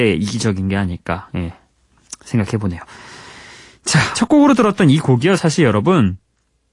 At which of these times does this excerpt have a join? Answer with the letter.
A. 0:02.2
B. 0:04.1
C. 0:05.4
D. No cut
B